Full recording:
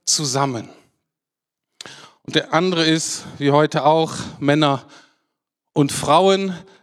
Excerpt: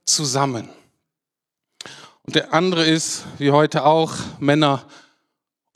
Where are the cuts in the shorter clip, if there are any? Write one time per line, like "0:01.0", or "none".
none